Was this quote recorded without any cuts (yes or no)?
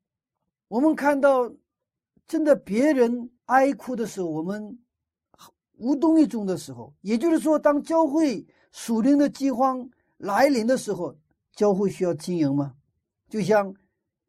no